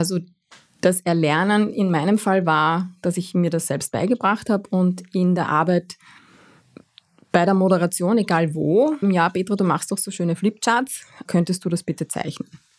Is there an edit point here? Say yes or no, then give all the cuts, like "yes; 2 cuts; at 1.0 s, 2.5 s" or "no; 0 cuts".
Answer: yes; 2 cuts; at 9.0 s, 11.2 s